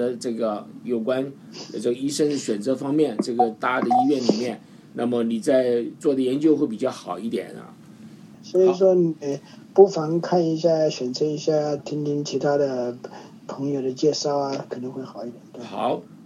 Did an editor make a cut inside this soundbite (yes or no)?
yes